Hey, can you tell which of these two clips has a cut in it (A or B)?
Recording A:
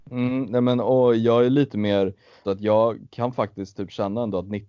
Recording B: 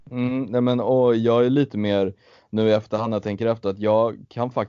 A